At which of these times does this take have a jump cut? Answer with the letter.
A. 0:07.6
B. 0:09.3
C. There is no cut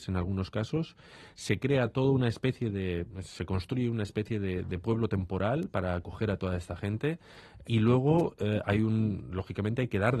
A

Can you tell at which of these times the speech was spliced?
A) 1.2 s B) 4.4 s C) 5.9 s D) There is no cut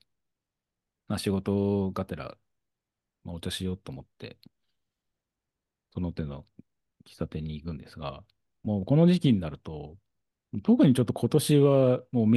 D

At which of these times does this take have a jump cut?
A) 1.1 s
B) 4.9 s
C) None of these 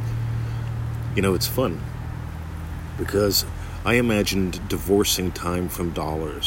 C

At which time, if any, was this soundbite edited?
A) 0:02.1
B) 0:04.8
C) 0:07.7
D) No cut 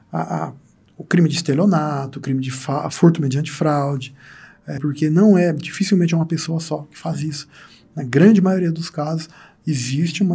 B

